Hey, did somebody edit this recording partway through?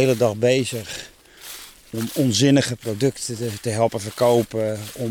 no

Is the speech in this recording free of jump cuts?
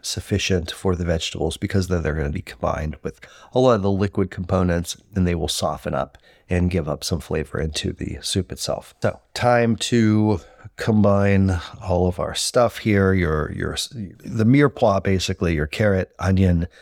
no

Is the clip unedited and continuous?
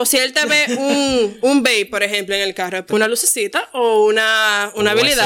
no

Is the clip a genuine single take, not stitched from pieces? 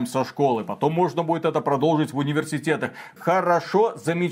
no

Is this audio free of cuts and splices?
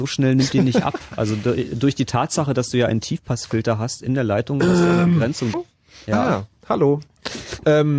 no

